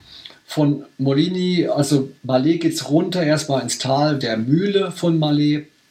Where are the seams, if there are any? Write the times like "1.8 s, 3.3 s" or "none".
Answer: 2.2 s, 4.2 s

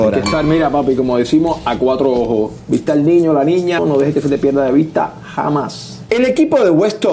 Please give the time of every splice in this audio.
3.8 s, 6.1 s

